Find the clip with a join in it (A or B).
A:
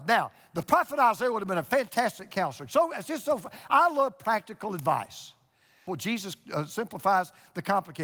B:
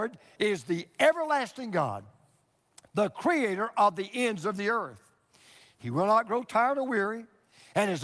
A